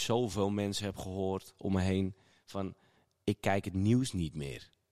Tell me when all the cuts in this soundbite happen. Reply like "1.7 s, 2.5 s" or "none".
none